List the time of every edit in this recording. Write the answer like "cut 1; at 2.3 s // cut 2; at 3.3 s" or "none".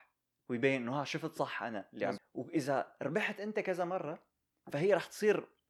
cut 1; at 2.2 s